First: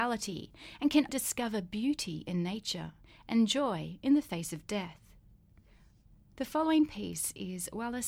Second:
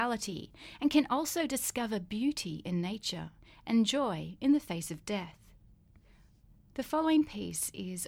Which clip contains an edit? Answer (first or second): first